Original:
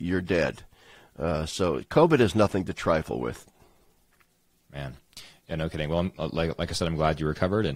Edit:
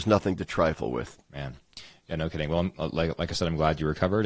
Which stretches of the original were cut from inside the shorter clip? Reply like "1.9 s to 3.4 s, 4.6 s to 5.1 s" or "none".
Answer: 3.5 s to 4.6 s